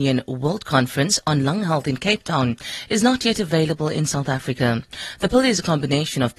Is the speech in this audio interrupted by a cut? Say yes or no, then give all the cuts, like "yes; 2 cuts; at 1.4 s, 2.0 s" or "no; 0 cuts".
no; 0 cuts